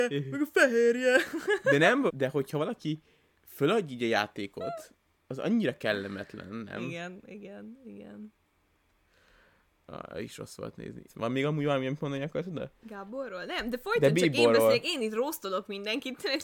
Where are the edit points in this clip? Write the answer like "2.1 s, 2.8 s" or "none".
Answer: 2.1 s, 11.1 s